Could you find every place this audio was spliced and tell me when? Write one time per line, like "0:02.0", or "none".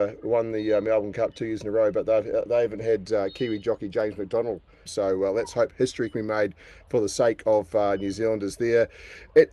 0:04.9